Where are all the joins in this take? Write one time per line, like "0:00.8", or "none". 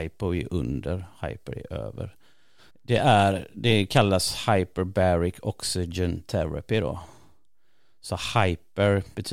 0:02.7

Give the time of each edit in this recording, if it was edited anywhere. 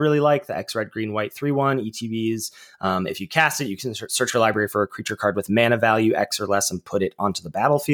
none

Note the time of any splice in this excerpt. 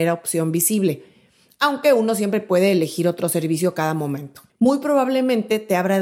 0:04.5

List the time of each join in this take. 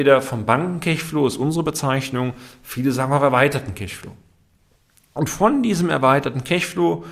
none

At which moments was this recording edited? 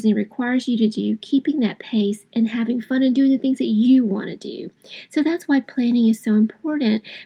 none

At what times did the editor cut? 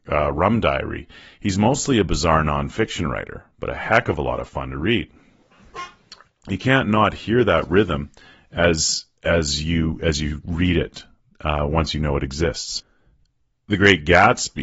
0:06.3

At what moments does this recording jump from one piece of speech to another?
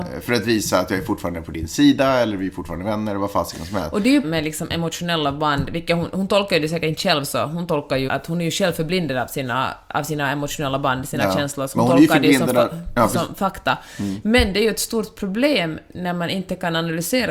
0:04.2
0:08.1

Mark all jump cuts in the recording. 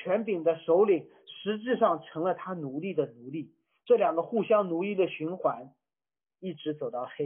none

